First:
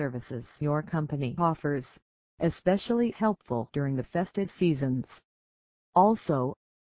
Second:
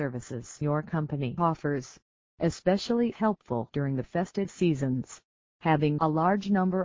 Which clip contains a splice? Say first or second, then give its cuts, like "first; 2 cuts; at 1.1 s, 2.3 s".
second; 1 cut; at 5.5 s